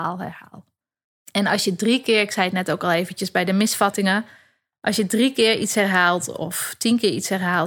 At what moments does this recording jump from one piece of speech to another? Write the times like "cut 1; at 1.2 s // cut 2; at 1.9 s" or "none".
cut 1; at 1.2 s